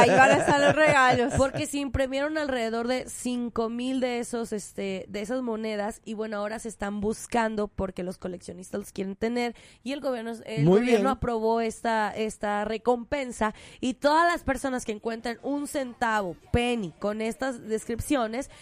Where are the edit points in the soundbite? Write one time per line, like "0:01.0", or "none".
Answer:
none